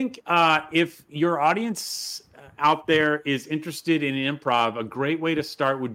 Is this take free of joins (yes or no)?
yes